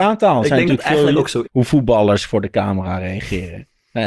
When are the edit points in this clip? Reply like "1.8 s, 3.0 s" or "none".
1.4 s